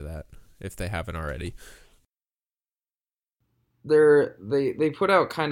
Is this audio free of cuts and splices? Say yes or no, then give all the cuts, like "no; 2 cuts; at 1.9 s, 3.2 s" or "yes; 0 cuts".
yes; 0 cuts